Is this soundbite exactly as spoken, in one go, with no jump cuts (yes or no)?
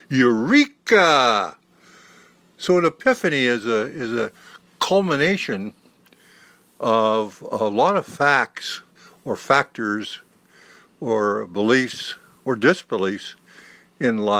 yes